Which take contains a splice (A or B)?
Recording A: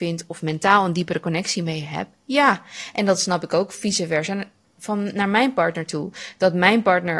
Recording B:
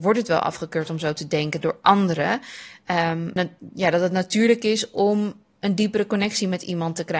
B